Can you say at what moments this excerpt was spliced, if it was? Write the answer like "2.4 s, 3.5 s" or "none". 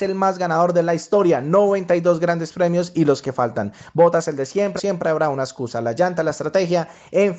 4.8 s